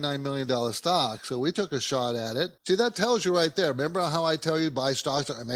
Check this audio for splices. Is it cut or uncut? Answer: cut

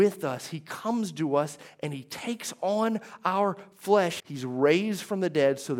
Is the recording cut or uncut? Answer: cut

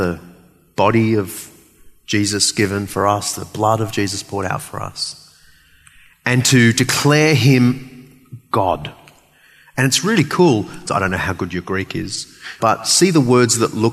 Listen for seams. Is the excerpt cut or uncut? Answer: cut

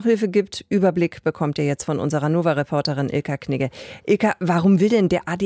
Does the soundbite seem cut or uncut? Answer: uncut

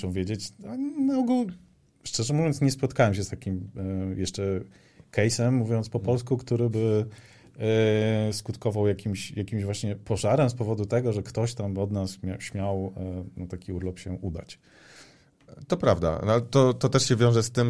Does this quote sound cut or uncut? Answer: uncut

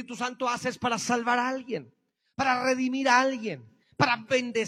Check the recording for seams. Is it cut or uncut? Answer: uncut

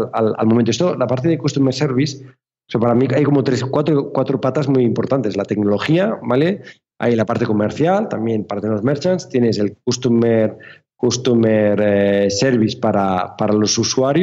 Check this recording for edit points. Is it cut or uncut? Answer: uncut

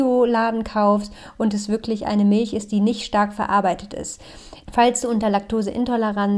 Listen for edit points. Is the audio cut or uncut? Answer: cut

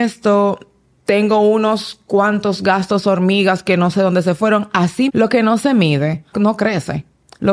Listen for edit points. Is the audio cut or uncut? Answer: cut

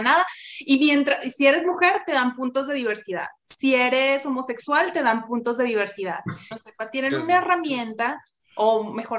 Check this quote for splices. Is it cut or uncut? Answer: cut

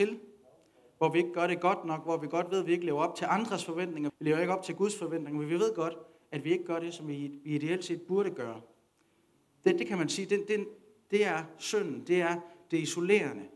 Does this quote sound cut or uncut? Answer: cut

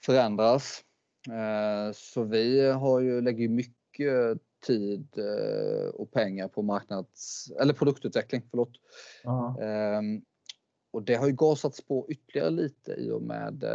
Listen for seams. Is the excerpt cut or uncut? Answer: uncut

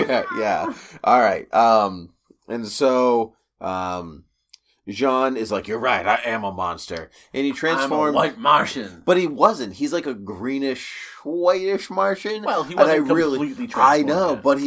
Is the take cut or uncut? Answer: uncut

